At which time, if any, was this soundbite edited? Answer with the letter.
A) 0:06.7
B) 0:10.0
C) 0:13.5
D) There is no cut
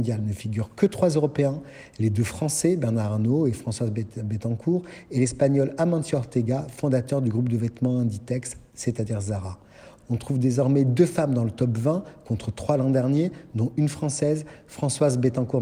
B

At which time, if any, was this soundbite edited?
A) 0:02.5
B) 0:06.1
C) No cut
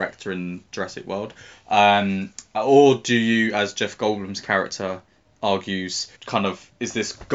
B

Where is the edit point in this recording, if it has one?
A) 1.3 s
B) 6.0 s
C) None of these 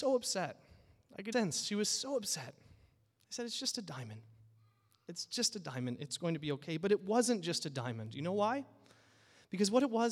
A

